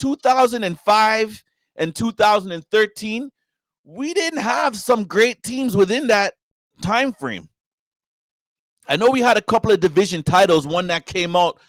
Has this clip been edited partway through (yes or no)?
no